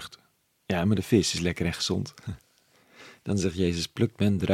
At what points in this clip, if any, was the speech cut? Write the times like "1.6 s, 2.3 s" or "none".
none